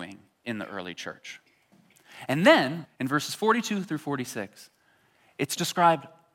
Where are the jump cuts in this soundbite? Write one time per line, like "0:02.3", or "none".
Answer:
0:02.8

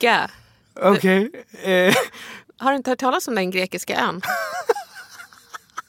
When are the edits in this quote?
0:02.4

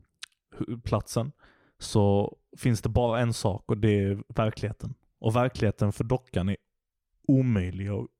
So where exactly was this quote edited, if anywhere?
none

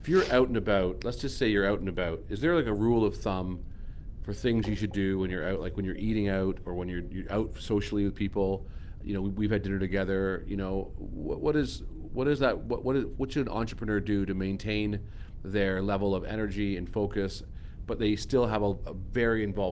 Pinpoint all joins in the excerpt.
none

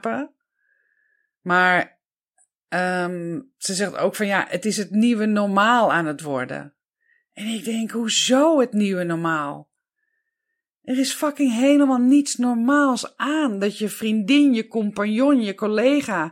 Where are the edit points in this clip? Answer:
none

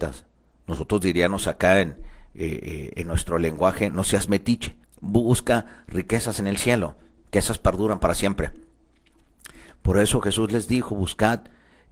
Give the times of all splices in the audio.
0:04.8
0:09.7

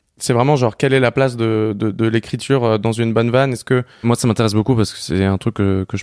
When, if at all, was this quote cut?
0:04.0

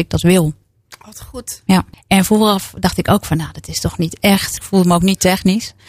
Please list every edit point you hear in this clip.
0:01.9
0:04.6

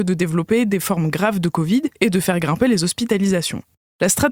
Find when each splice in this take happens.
0:02.0

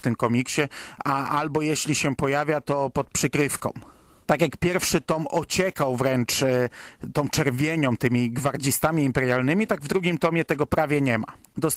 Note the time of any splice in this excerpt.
none

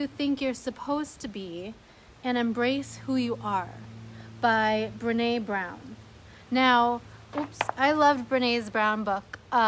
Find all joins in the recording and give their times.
0:07.3

